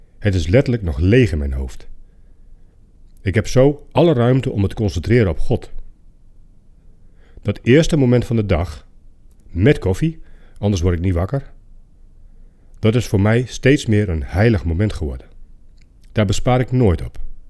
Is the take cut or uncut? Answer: cut